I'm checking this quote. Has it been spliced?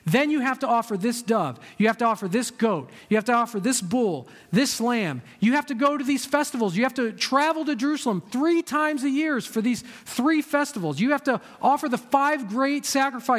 no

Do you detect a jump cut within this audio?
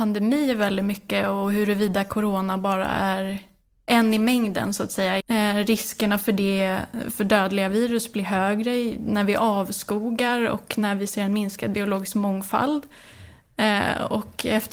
yes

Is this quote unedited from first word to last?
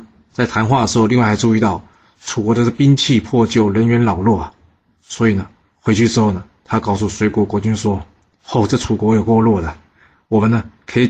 yes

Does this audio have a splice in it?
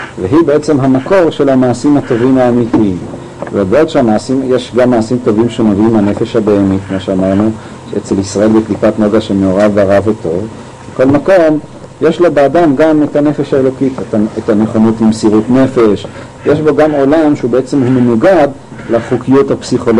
yes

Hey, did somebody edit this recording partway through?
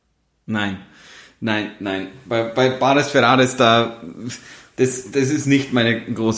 no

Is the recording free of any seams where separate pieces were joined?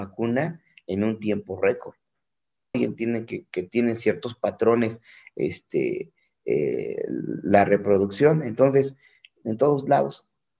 no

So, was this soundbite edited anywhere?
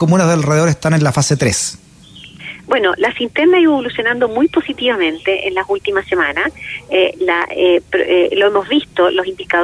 no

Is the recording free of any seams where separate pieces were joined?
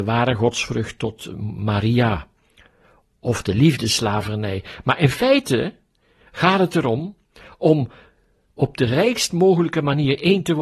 yes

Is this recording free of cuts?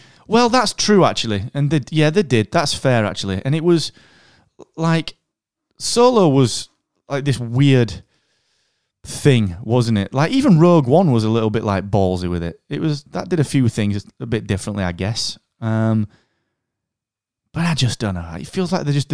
no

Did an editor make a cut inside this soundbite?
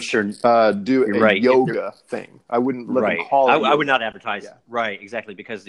no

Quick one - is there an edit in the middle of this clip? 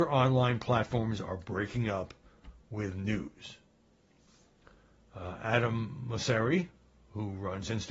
no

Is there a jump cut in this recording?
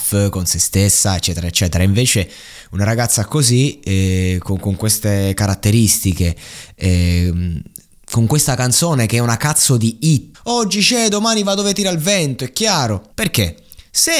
yes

